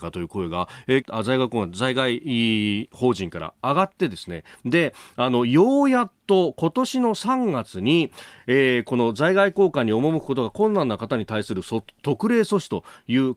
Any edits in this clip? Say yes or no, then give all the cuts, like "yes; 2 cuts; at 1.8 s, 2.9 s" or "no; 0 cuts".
yes; 1 cut; at 1.0 s